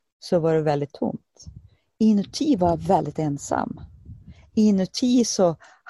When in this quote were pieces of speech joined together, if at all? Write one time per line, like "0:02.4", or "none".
none